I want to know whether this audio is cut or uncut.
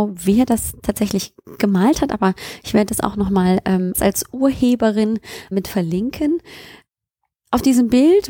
cut